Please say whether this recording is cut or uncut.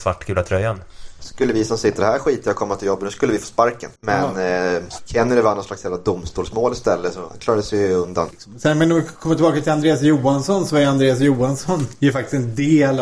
cut